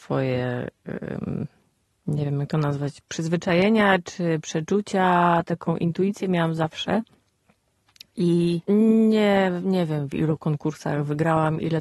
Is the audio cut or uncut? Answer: cut